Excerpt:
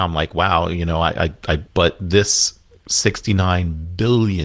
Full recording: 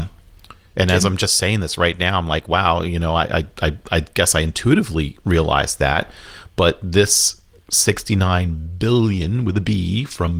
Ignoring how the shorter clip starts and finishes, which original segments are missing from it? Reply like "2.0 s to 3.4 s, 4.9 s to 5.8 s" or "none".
3.8 s to 6.5 s